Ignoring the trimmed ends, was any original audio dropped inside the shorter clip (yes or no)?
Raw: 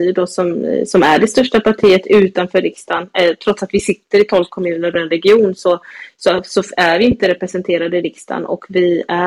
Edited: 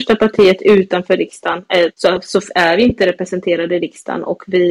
yes